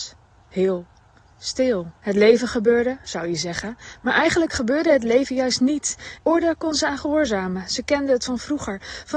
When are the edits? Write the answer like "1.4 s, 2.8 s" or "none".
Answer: 2.0 s, 6.2 s